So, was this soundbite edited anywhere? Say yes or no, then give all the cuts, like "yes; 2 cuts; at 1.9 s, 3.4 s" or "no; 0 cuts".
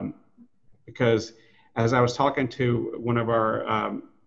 no; 0 cuts